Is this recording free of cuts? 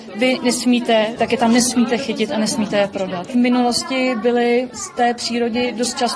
no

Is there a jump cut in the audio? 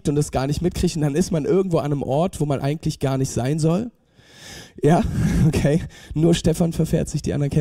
no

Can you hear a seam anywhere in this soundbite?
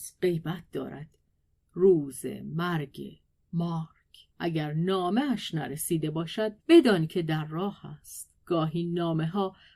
yes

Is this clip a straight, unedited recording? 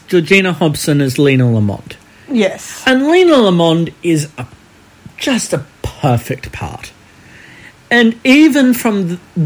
yes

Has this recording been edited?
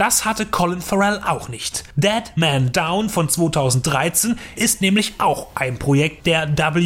yes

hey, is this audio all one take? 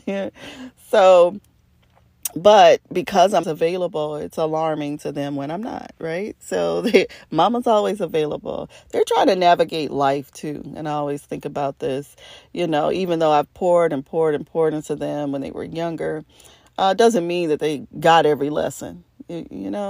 no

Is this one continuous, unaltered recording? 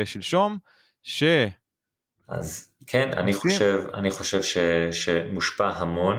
no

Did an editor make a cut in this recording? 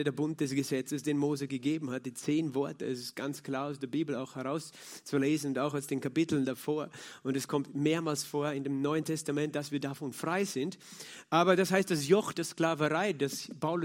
no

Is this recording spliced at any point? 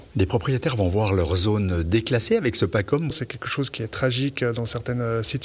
yes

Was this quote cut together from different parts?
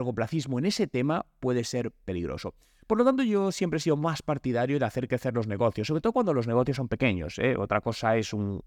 no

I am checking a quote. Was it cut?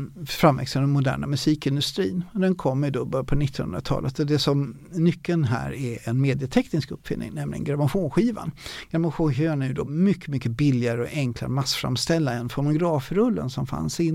no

